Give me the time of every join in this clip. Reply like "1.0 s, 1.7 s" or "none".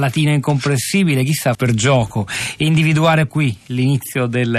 1.5 s, 3.3 s